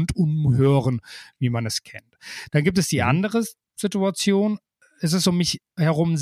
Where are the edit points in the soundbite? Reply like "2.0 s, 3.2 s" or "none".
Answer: none